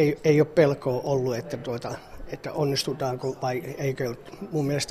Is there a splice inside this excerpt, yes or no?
no